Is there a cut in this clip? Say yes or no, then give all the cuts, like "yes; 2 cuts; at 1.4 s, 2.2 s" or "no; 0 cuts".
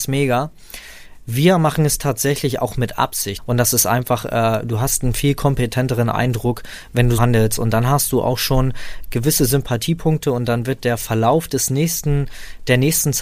yes; 2 cuts; at 3.4 s, 7.2 s